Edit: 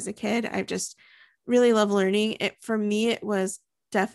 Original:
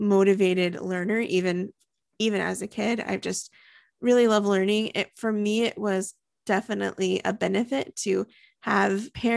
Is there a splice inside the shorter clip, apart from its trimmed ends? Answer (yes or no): no